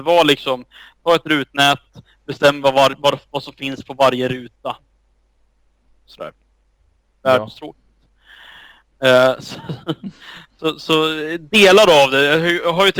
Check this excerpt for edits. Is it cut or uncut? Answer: uncut